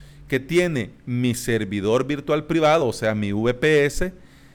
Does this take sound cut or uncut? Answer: uncut